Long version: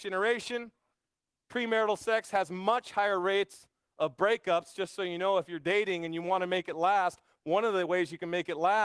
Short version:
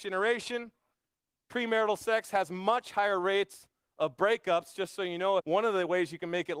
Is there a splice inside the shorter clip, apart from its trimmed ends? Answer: yes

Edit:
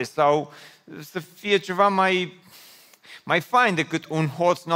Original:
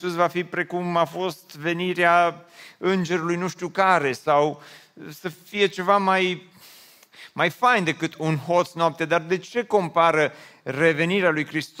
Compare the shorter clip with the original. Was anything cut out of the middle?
no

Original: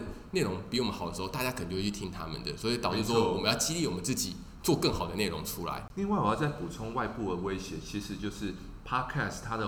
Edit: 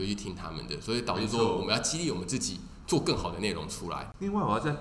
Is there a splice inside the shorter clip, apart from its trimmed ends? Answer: no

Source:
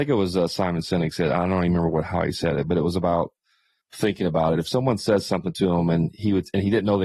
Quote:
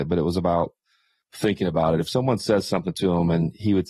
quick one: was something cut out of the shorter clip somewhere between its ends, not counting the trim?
no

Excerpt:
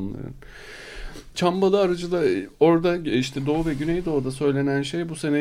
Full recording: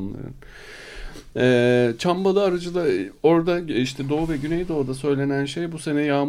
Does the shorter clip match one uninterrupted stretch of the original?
no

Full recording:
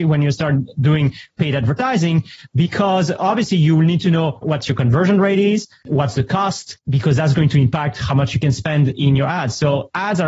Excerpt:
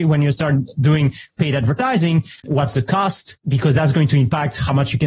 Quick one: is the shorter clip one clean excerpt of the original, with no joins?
no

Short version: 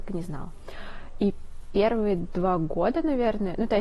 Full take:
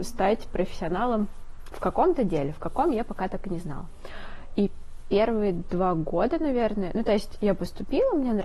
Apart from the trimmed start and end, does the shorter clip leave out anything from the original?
no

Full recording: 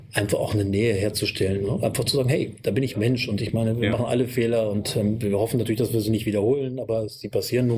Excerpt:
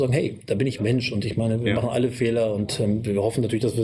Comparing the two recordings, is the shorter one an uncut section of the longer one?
yes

